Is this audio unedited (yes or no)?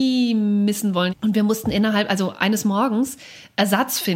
no